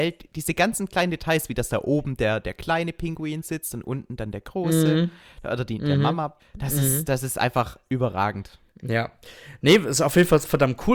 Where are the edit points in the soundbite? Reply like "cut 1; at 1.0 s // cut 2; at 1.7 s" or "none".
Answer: cut 1; at 6.4 s // cut 2; at 8.7 s